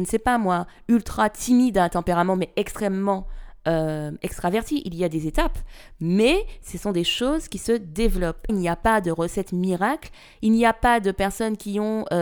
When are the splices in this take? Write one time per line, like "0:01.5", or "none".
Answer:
0:08.5

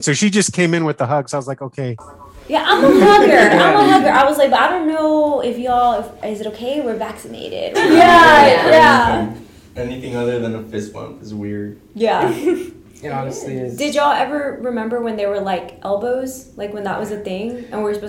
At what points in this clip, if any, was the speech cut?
0:06.2
0:07.7

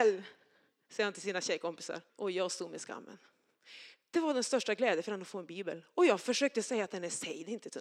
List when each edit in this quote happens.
0:02.1

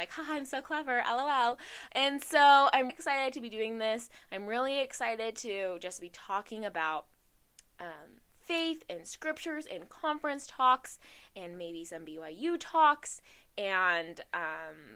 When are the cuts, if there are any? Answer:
0:01.9
0:02.9

